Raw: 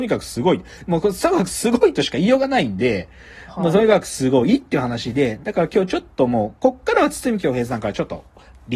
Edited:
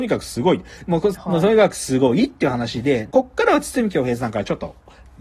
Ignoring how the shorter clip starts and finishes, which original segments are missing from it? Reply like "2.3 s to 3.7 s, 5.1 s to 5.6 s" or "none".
1.1 s to 3.5 s, 5.4 s to 6.6 s